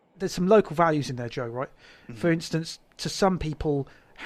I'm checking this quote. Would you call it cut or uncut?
uncut